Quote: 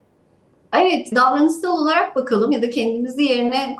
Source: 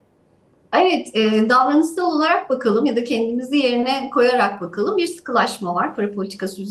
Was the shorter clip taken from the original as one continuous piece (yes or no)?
no